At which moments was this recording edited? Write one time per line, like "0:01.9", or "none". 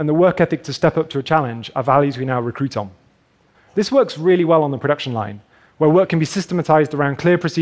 0:03.5

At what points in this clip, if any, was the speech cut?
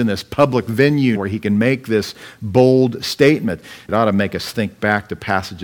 0:01.2
0:03.9

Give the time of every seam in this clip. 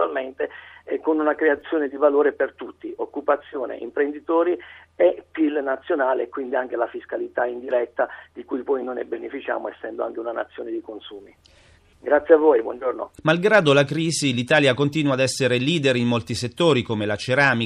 0:11.9
0:13.2

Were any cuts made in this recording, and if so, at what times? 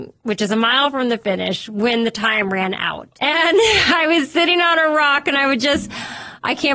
0:03.2

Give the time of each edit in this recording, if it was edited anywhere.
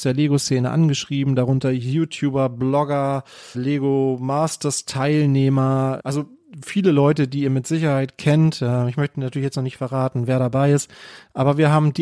0:03.5
0:06.0

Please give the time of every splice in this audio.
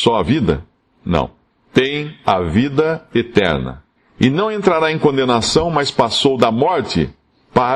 none

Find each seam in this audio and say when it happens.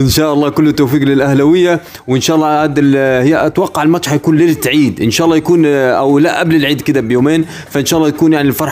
none

